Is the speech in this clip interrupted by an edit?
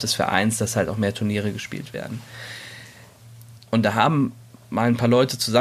yes; 1 cut; at 3.6 s

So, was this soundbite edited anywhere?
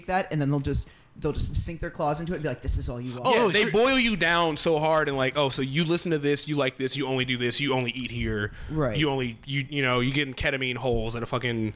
yes; 1 cut; at 9.7 s

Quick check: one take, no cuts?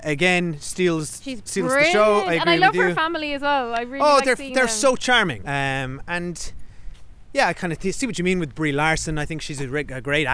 no; 1 cut; at 5.4 s

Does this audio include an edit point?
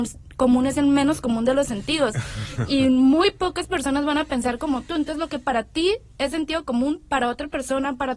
no; 0 cuts

